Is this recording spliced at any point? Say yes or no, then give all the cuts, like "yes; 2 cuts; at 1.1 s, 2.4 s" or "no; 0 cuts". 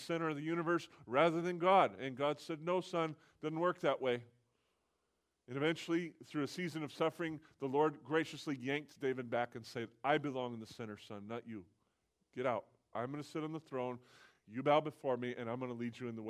no; 0 cuts